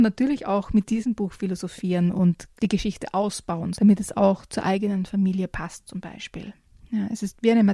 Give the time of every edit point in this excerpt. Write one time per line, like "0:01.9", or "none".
0:02.6
0:03.7